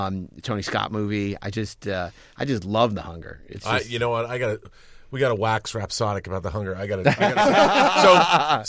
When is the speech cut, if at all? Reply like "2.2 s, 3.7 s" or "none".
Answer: none